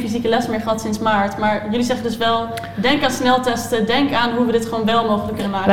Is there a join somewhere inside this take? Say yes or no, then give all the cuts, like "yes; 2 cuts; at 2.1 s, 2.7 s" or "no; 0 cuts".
no; 0 cuts